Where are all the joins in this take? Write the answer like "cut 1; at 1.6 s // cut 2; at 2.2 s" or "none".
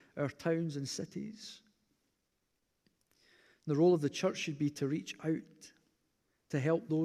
none